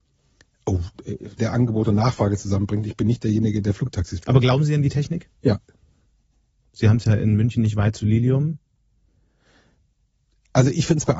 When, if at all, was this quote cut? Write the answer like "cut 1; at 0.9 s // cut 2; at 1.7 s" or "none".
cut 1; at 1.4 s // cut 2; at 5.3 s